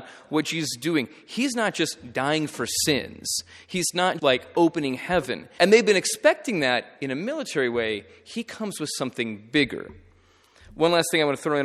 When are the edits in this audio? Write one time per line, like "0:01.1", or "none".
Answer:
0:04.2
0:05.6